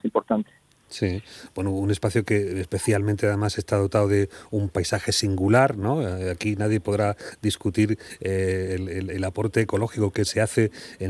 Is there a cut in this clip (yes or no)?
no